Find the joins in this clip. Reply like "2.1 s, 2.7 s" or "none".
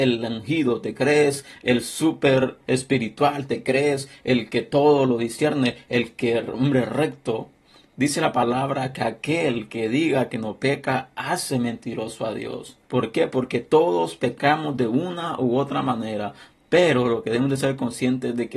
12.8 s